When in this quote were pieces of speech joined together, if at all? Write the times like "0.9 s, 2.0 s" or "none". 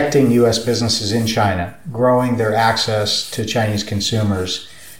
none